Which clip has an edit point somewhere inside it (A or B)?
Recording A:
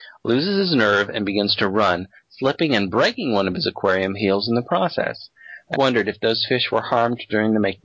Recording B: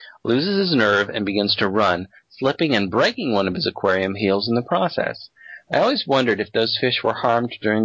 A